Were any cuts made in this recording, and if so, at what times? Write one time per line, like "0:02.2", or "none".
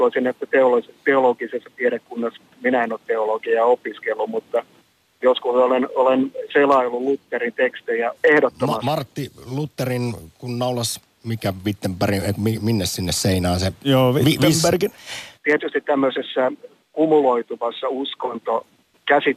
0:08.2
0:15.4